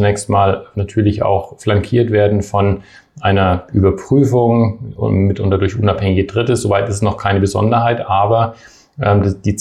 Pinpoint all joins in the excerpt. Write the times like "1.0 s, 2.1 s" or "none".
none